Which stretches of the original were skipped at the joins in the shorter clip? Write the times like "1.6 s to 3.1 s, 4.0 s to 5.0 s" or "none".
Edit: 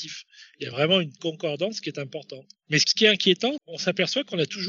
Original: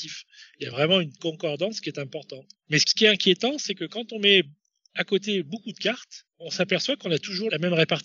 3.6 s to 6.3 s